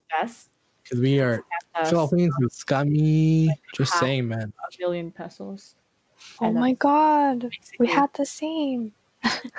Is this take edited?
no; 0 cuts

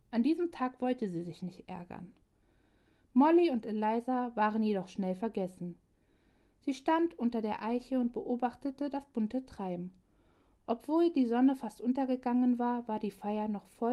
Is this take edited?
no; 0 cuts

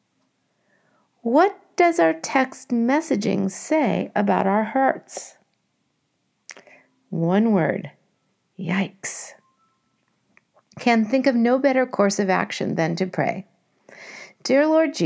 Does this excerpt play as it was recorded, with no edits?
yes; 0 cuts

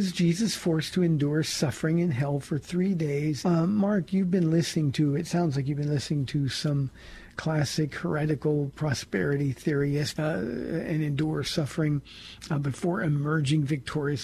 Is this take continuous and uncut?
no; 2 cuts; at 3.4 s, 10.1 s

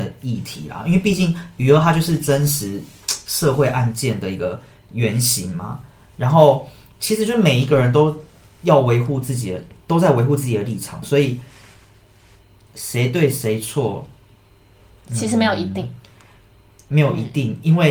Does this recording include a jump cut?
yes; 1 cut; at 16.9 s

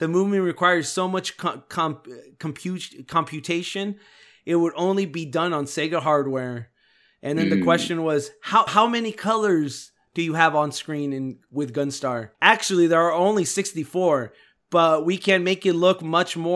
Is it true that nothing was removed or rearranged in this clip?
no; 2 cuts; at 8.7 s, 12.3 s

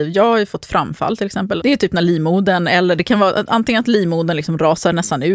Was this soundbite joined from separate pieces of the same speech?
yes; 1 cut; at 1.6 s

